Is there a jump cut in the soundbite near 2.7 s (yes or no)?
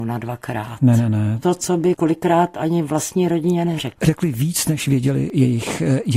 no